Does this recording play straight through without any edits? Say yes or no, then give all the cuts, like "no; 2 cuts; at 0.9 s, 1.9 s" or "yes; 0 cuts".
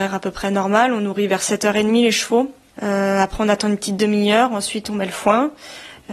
no; 1 cut; at 2.7 s